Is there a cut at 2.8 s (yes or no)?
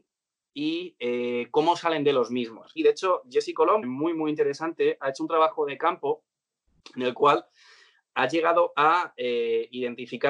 yes